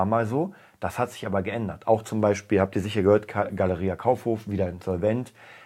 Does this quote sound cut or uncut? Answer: uncut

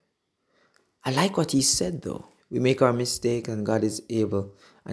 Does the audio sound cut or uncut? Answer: cut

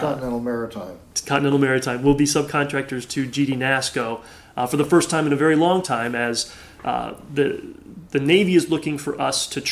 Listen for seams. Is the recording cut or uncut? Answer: uncut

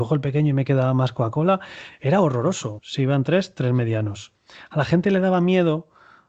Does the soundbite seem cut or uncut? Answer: cut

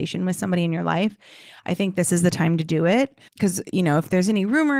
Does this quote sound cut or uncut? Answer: cut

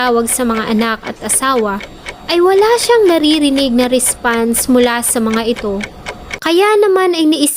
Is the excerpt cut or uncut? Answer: uncut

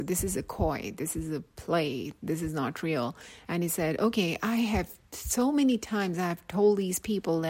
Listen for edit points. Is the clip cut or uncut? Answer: uncut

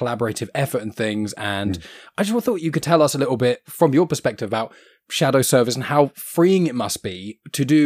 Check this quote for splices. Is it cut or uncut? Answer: uncut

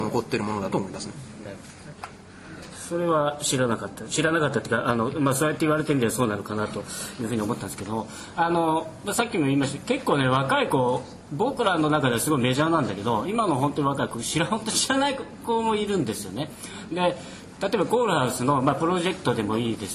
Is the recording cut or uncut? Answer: uncut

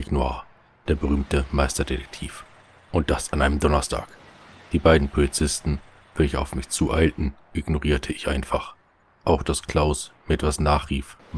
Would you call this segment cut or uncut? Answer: uncut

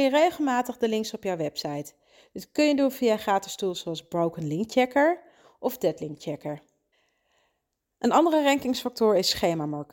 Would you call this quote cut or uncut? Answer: uncut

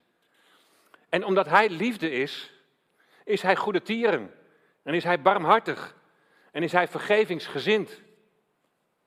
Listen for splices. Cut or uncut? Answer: uncut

